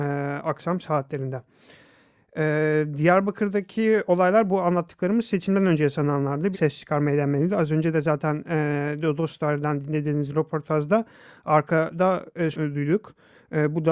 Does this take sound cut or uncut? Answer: cut